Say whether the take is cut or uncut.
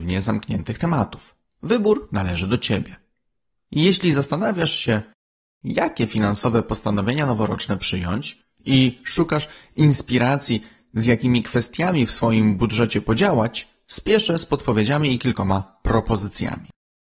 uncut